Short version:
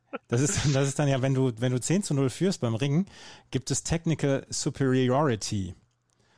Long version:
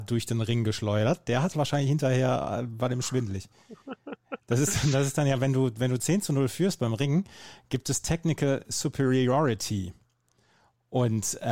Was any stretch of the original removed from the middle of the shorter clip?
no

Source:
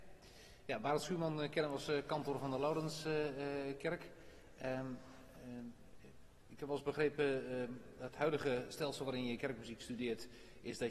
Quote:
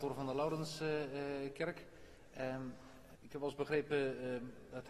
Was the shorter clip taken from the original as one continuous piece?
no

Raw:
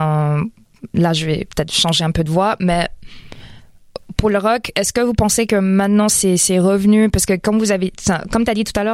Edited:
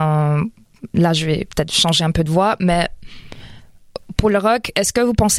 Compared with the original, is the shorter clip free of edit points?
yes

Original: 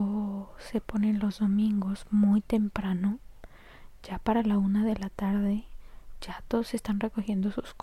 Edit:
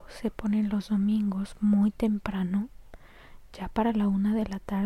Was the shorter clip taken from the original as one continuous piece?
yes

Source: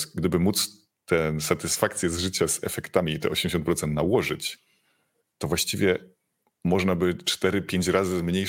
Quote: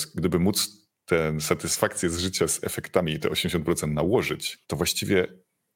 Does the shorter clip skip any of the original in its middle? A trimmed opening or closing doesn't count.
yes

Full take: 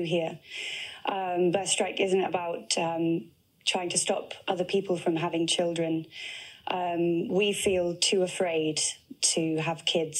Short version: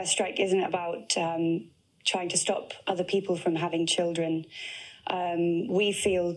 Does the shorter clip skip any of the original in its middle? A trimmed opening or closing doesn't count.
no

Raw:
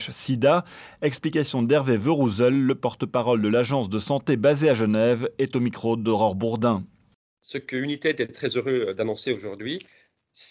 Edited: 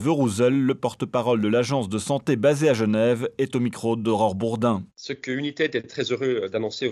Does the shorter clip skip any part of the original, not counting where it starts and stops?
yes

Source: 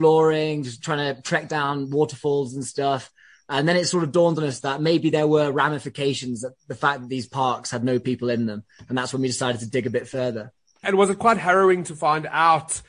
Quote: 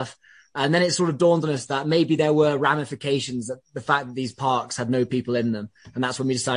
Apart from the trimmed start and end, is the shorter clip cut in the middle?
no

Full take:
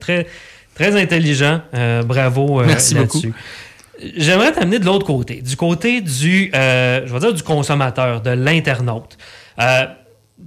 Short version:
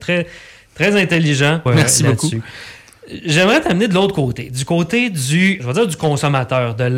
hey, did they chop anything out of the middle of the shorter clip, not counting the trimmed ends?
yes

